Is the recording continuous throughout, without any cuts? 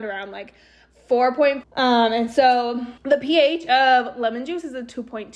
no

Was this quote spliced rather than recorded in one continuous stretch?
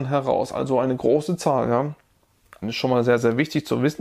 yes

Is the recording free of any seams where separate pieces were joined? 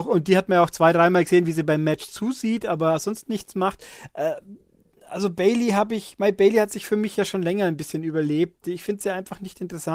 yes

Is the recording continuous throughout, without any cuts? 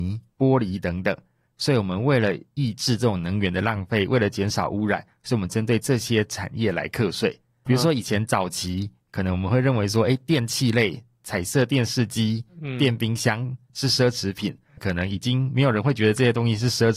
no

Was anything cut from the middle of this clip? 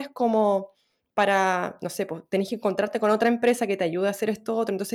no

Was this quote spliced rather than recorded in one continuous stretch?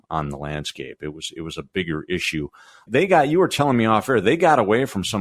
no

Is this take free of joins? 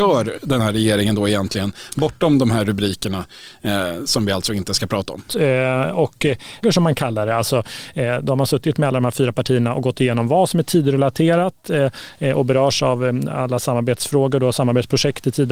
no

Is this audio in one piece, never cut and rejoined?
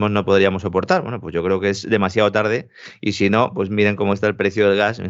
yes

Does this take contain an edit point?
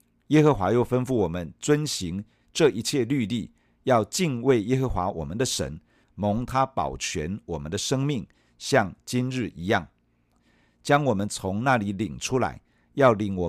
yes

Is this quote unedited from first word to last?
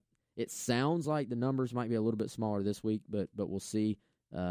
yes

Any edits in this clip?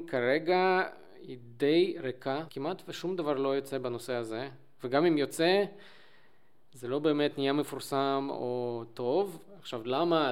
yes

